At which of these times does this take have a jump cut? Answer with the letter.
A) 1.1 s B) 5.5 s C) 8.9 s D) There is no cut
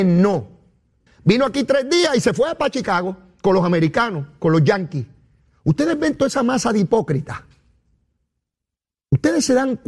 A